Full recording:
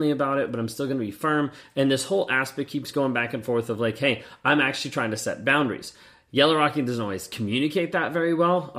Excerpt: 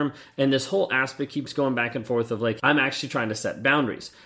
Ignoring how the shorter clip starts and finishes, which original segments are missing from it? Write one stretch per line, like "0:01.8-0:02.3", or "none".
0:04.0-0:04.4

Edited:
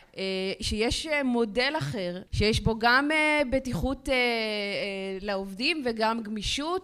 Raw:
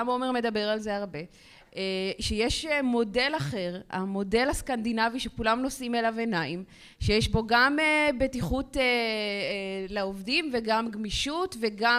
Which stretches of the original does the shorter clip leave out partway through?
0:03.9-0:07.0

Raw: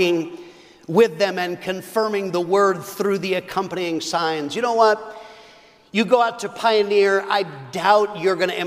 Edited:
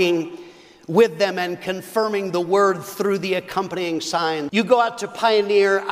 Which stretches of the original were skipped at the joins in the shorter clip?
0:04.5-0:05.9

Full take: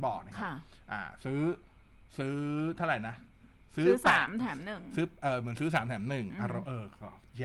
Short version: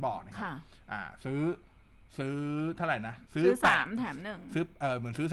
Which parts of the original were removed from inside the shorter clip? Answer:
0:03.2-0:03.7

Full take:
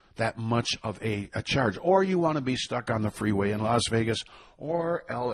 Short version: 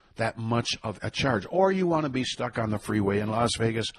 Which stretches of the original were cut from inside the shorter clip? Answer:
0:01.0-0:01.3

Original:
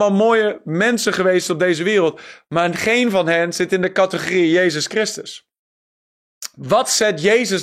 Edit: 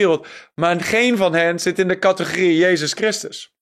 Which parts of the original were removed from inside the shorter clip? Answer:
none

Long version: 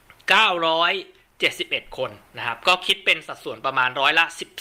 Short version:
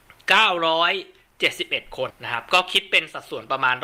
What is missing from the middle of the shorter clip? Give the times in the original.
0:02.1-0:02.2

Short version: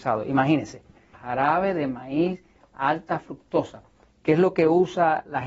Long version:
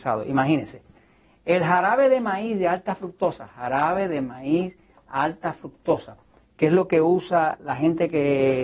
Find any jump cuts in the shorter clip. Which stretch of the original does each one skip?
0:01.1-0:03.5

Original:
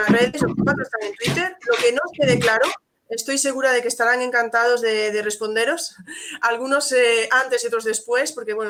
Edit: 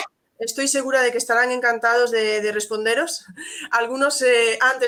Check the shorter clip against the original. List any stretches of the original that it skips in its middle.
none

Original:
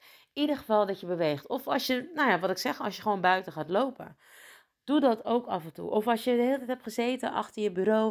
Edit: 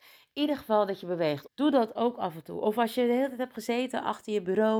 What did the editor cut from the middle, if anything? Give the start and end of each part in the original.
0:01.5-0:04.8

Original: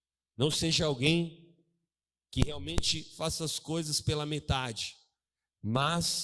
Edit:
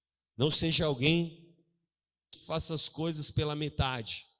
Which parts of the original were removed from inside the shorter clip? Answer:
0:02.3-0:03.1

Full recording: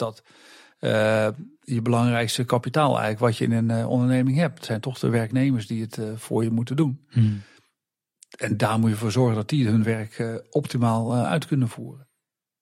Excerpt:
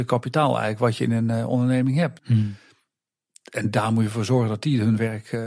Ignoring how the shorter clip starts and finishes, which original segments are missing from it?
0:04.6-0:07.1

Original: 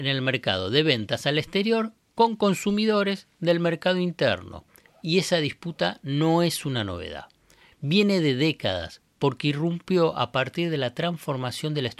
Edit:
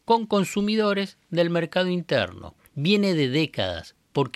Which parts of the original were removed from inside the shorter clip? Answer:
0:04.7-0:07.7

